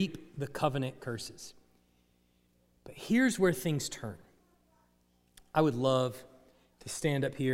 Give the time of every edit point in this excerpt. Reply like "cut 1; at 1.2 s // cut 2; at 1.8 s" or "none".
none

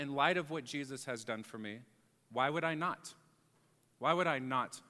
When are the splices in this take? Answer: none

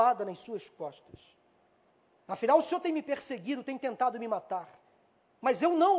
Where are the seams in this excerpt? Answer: none

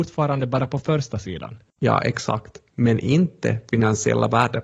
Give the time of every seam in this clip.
cut 1; at 1.7 s

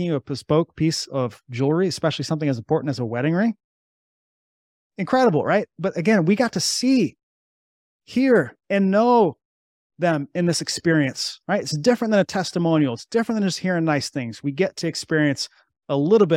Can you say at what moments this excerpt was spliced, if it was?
cut 1; at 8.6 s

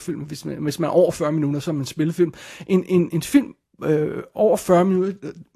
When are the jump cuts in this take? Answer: cut 1; at 3.1 s

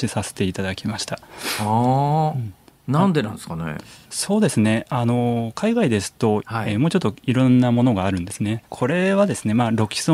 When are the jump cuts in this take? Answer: cut 1; at 6.4 s // cut 2; at 8.7 s

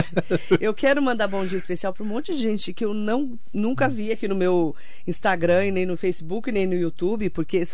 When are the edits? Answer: none

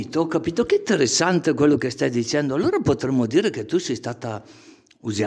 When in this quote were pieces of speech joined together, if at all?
none

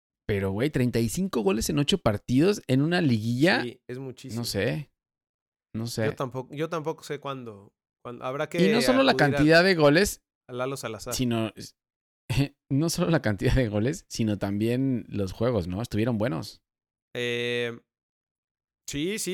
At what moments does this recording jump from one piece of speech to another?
none

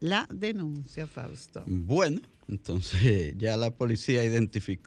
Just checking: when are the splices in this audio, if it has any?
none

